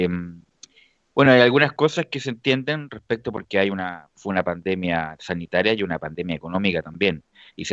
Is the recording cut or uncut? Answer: uncut